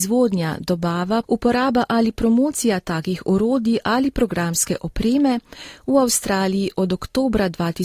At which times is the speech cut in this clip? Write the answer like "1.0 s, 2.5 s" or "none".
1.2 s